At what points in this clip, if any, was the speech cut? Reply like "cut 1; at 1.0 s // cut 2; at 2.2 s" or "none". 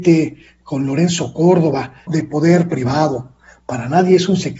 cut 1; at 2.1 s